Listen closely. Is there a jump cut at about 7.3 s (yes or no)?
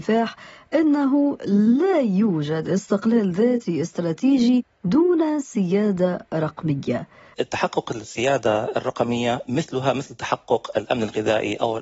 yes